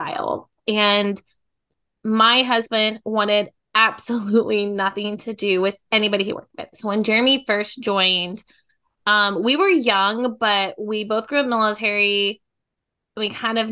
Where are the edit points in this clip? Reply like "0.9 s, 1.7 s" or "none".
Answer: 6.7 s